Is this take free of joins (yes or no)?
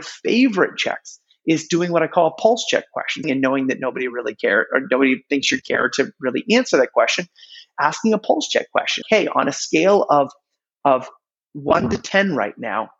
no